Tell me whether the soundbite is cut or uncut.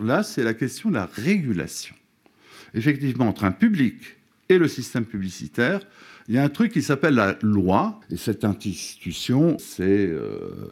cut